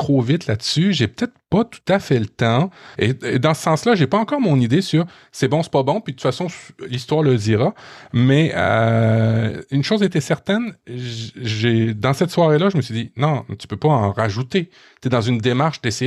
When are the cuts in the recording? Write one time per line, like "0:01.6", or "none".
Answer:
0:02.9

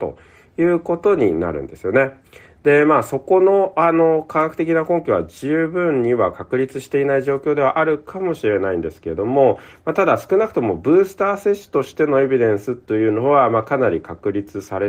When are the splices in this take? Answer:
none

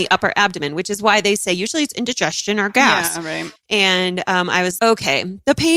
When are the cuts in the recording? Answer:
0:03.6
0:04.8

